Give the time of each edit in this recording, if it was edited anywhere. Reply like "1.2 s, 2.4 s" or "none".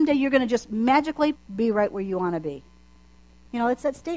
1.3 s